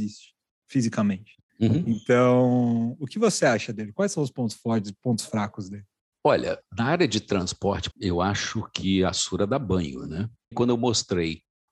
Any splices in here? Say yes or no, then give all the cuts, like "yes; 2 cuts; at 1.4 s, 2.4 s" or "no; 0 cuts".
yes; 2 cuts; at 7.9 s, 10.5 s